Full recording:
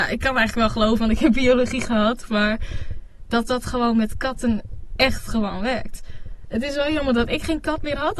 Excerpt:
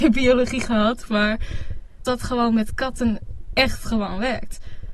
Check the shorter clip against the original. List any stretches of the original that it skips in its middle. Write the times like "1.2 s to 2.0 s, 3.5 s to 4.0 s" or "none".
3.2 s to 3.5 s